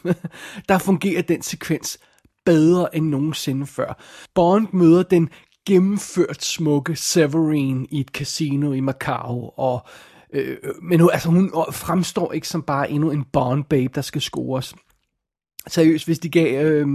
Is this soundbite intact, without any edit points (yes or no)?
yes